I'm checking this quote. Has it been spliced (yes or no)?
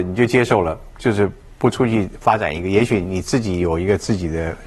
no